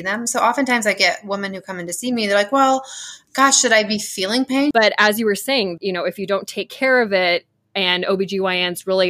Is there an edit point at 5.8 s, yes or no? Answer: yes